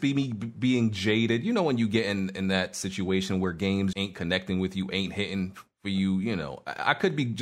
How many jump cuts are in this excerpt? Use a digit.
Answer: 1